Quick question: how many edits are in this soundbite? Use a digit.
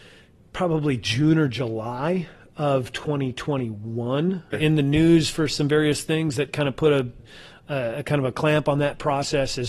2